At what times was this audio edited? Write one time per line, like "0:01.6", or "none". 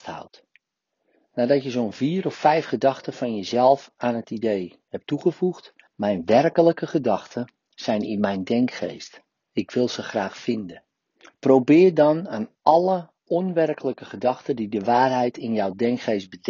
0:05.9

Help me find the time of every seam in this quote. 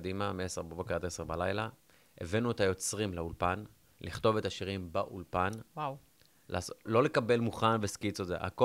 0:06.8

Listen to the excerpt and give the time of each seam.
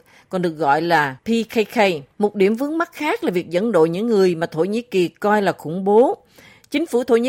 0:02.1

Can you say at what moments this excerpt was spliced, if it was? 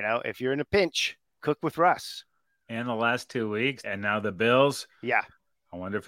0:01.3
0:03.8

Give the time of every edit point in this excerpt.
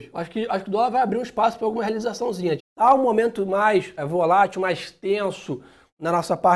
0:02.6
0:04.0

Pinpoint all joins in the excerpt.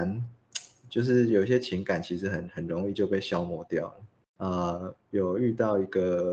0:04.2

